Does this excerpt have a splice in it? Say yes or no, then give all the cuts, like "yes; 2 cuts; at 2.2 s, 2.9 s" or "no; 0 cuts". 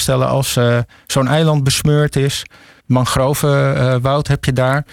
yes; 1 cut; at 2.8 s